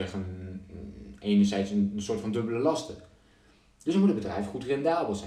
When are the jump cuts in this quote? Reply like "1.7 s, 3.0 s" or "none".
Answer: none